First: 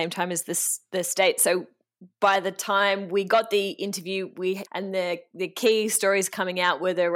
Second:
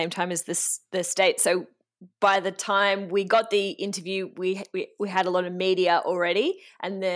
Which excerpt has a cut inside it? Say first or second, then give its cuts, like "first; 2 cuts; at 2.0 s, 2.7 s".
first; 1 cut; at 4.7 s